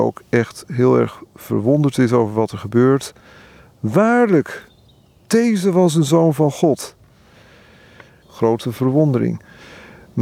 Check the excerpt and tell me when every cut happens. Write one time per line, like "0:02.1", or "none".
0:08.2